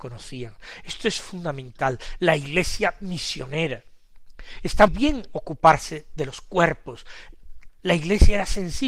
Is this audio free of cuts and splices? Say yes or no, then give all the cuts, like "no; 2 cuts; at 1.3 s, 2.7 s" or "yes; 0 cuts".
no; 2 cuts; at 4.9 s, 7.7 s